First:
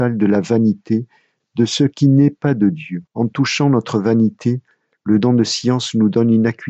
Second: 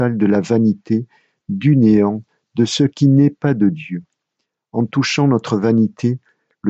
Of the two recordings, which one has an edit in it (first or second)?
first